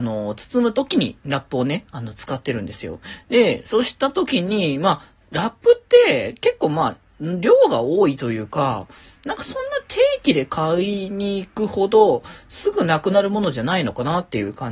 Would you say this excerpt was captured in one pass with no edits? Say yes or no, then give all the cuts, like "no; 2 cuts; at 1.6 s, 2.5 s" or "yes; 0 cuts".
yes; 0 cuts